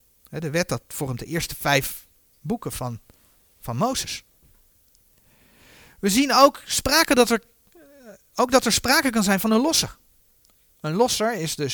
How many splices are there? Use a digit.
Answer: 0